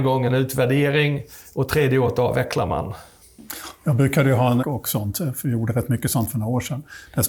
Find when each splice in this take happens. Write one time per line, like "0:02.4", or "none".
0:04.6